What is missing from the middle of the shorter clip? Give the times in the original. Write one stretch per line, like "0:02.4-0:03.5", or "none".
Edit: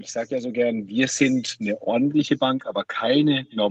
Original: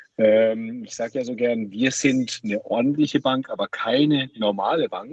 none